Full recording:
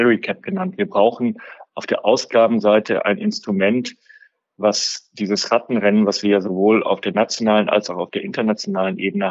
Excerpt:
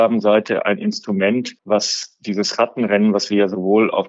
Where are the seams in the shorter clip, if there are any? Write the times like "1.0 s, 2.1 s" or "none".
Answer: 1.6 s